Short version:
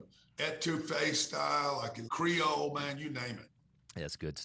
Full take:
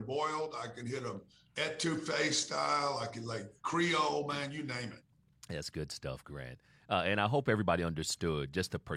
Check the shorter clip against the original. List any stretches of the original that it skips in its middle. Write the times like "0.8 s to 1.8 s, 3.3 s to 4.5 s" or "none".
3.2 s to 3.6 s